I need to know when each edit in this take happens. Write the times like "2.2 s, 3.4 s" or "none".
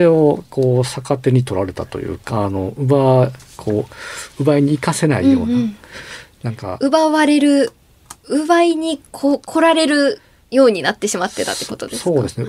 2.3 s, 9.1 s